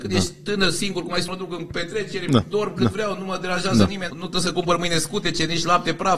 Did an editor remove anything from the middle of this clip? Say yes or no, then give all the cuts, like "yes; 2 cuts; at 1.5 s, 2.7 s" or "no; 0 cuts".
yes; 2 cuts; at 1.3 s, 4.1 s